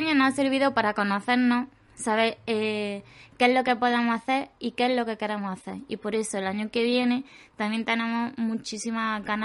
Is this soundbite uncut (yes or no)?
yes